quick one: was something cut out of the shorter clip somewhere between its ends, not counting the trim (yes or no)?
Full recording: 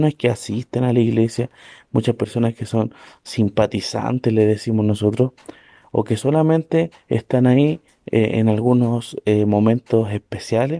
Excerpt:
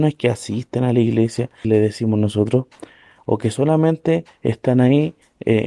yes